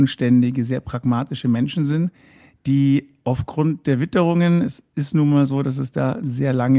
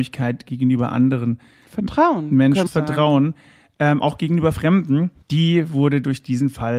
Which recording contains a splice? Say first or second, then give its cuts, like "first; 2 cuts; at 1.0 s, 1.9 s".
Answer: second; 2 cuts; at 2.7 s, 5.2 s